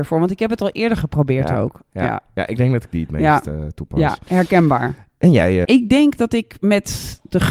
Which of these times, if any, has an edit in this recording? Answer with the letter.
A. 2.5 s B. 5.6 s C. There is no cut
B